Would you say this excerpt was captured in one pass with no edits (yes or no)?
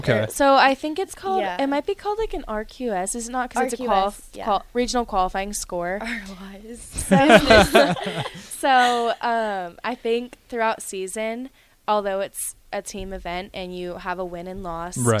yes